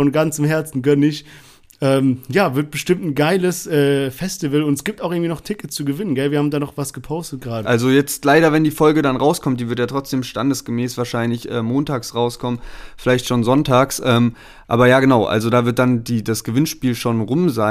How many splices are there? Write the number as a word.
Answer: one